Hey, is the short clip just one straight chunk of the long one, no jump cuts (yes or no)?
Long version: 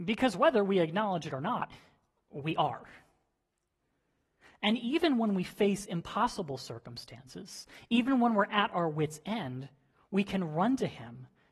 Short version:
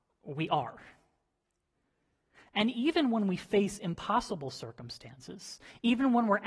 yes